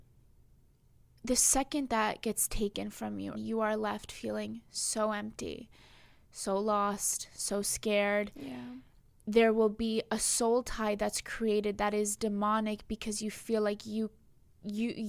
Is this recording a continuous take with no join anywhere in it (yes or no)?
no